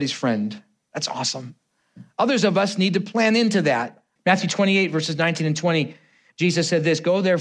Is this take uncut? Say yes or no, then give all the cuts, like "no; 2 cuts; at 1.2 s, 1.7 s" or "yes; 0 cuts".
no; 1 cut; at 4.2 s